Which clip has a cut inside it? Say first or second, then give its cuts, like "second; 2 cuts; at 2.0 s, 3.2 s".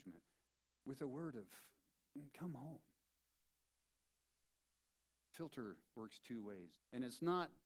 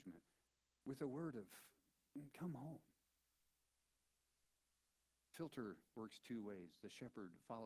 first; 1 cut; at 6.8 s